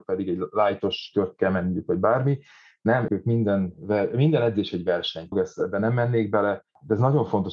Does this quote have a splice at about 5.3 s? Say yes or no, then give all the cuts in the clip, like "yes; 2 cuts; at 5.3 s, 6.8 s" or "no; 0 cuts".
yes; 2 cuts; at 3.1 s, 5.3 s